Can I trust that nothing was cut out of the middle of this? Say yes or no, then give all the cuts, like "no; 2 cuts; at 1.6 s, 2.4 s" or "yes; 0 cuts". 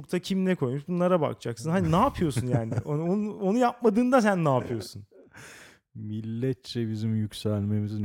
yes; 0 cuts